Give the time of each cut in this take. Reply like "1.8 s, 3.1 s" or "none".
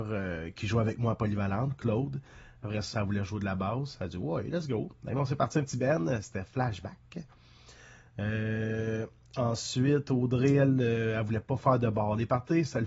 2.9 s

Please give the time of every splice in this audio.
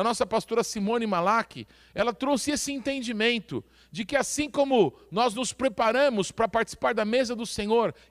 none

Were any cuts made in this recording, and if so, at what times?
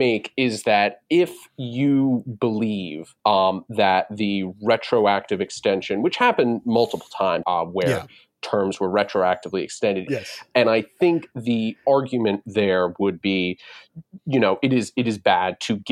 3.2 s, 7.4 s, 10.1 s

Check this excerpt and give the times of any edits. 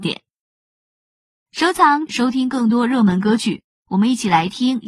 2.1 s

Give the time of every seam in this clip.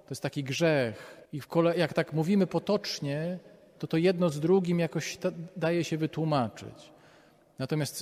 1.2 s

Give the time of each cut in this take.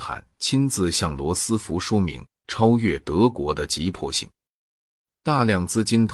none

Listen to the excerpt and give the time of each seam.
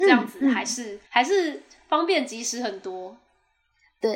1.1 s

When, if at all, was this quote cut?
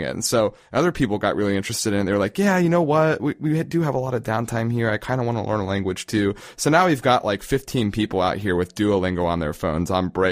none

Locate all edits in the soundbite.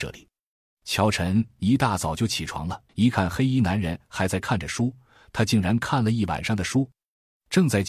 2.9 s

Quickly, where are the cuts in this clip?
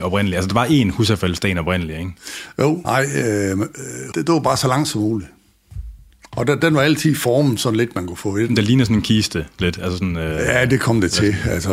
2.8 s, 4.1 s

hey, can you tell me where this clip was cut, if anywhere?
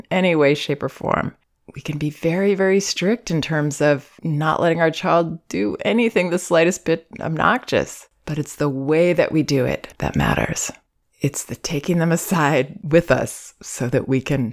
none

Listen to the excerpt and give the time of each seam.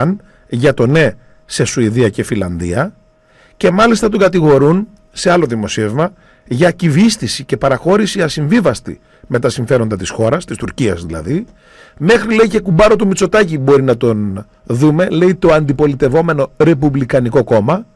none

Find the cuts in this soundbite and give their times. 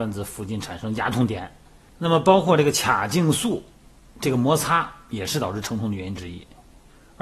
1.9 s

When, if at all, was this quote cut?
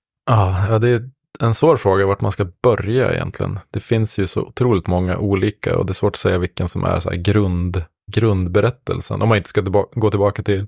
8.1 s

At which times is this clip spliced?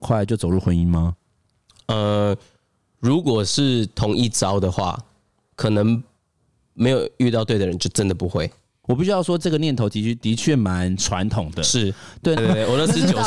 8.8 s, 12.4 s

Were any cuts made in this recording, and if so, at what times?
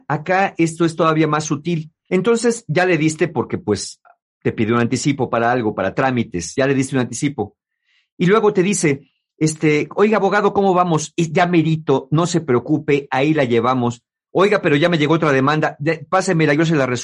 2.1 s

